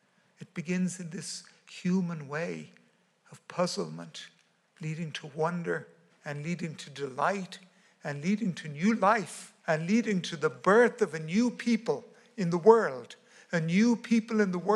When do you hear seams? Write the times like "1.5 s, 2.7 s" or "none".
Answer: 6.1 s, 9.6 s